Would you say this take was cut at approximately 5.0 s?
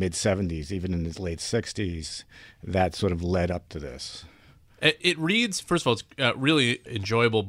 yes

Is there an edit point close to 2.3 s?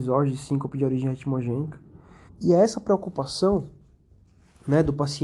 yes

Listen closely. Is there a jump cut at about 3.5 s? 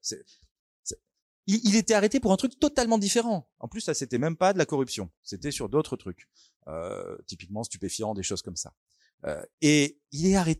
no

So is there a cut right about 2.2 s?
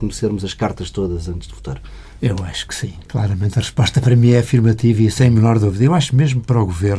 yes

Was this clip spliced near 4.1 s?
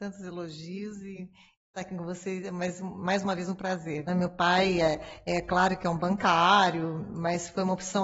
yes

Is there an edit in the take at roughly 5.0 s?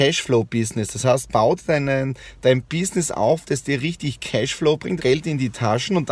yes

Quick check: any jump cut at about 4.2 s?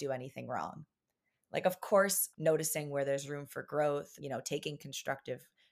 yes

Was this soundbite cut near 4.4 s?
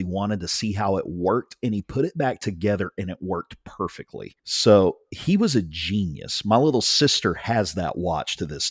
yes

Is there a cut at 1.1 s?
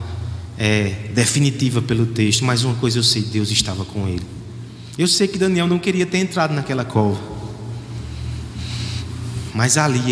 no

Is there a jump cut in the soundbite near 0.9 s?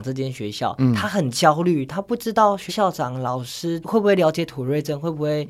no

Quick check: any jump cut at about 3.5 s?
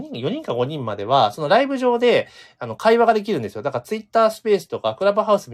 no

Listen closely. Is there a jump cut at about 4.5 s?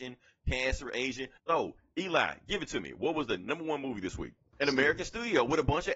yes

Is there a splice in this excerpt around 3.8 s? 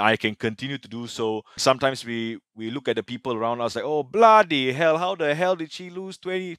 no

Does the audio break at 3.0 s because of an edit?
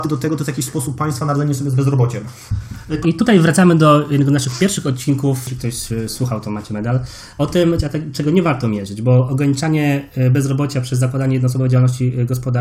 yes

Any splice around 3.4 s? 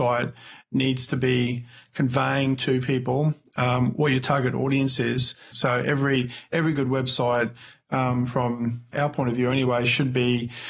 no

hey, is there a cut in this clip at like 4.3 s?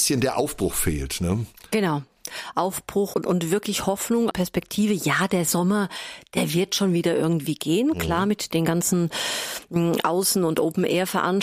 yes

